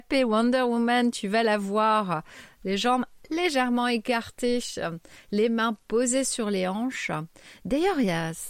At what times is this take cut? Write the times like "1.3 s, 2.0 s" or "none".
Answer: none